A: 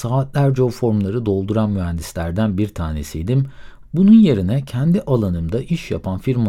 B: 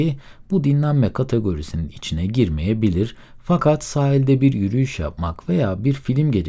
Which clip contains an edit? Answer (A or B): A